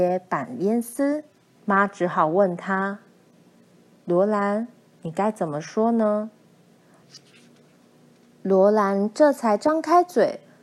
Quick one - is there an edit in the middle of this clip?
yes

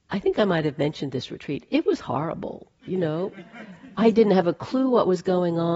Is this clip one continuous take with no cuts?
yes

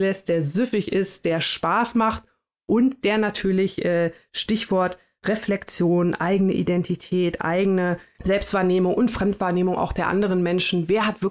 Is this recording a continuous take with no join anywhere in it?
yes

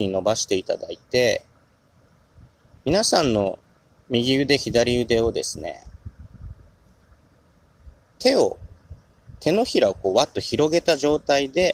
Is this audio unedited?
yes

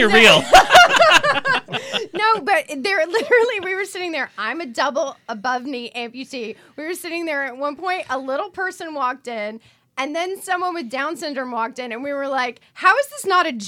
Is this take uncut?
yes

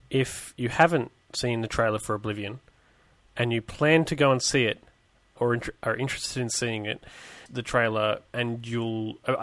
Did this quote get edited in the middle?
yes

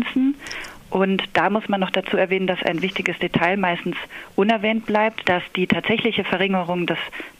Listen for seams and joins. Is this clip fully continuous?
no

